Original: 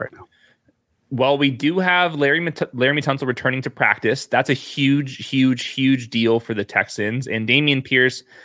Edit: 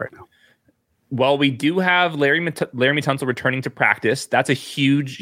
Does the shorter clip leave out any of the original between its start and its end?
no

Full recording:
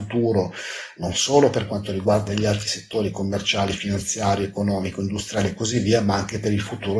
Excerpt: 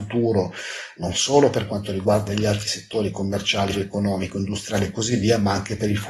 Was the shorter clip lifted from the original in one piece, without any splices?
no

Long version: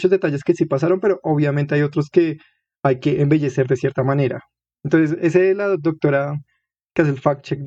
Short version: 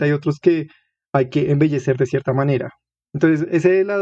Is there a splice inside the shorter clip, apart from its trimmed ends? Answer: no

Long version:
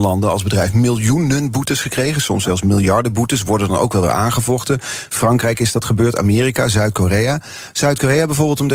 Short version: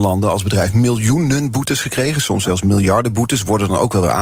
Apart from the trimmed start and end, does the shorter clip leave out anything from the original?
no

